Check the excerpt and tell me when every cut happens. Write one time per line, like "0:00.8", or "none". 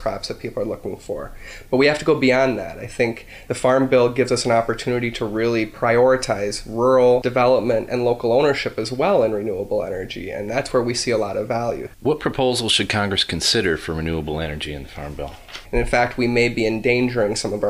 0:11.9
0:15.6